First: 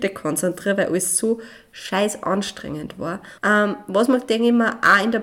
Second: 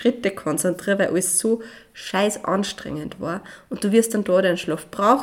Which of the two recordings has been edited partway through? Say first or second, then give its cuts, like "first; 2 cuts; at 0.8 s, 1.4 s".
first; 1 cut; at 3.4 s